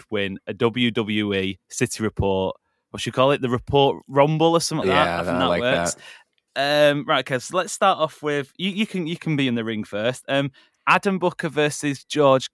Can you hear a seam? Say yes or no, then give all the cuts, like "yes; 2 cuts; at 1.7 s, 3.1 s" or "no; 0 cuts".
yes; 1 cut; at 4.8 s